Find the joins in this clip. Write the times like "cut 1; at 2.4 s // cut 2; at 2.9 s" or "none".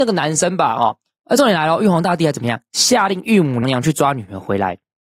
cut 1; at 3.6 s